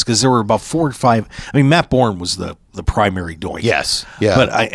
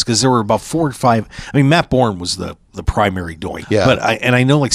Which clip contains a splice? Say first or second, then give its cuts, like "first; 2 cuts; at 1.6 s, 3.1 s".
second; 1 cut; at 3.6 s